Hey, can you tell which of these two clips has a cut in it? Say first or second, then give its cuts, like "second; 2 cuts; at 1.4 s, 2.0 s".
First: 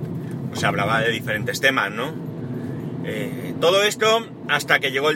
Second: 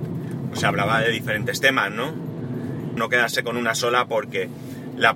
second; 1 cut; at 3.0 s